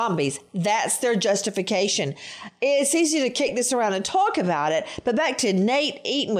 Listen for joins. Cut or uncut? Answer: uncut